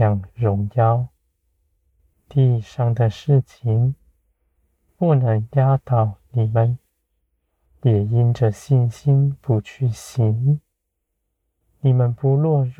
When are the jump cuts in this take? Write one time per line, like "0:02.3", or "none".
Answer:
0:02.1
0:07.7